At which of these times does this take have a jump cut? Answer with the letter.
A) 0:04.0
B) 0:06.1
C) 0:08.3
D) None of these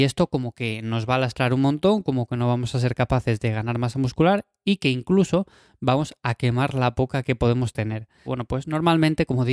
C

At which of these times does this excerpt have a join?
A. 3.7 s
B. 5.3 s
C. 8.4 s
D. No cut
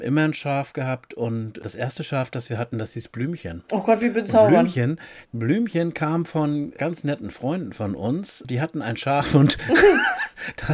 B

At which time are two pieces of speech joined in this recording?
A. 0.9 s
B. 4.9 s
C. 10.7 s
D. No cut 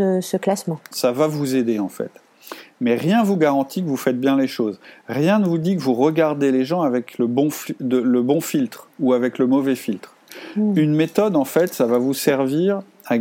A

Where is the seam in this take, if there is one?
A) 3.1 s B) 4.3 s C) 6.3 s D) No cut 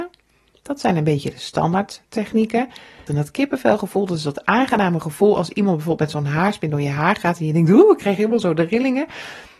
A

